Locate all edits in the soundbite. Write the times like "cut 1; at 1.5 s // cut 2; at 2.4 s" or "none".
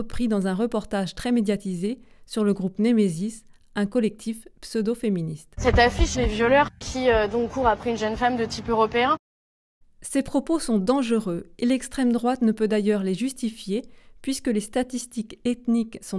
cut 1; at 6.1 s